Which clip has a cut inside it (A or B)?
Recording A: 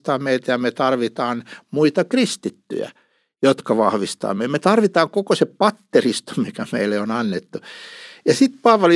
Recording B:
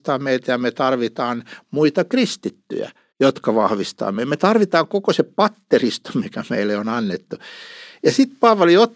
B